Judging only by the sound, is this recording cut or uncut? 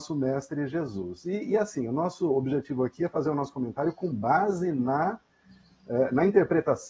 uncut